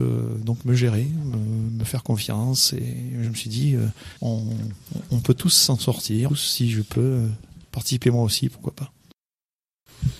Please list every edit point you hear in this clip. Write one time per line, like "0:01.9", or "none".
0:04.2
0:06.3
0:07.6